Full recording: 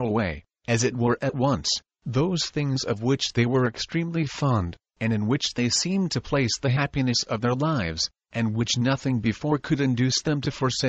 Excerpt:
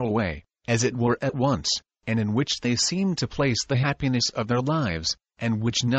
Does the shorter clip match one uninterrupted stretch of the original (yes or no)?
no